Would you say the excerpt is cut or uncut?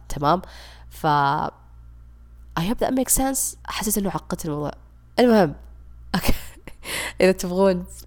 cut